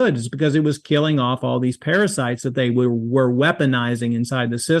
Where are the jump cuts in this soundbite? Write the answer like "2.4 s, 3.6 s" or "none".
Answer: none